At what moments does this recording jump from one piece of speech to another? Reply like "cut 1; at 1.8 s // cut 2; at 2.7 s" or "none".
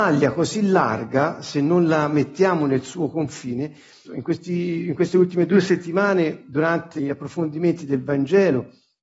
cut 1; at 4.0 s // cut 2; at 7.0 s